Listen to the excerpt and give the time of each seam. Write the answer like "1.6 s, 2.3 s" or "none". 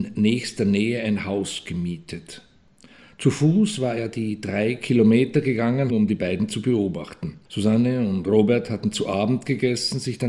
5.9 s, 7.4 s